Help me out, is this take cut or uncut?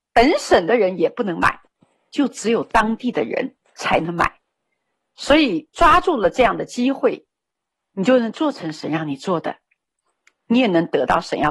uncut